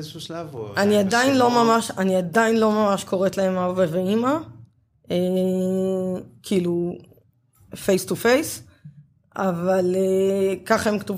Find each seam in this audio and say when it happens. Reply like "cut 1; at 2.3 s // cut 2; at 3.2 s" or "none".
none